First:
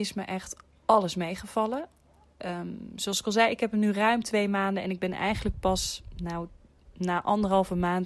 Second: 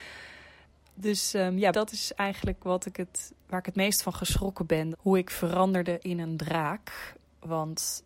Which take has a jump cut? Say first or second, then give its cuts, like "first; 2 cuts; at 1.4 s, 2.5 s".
second; 2 cuts; at 1.7 s, 4.9 s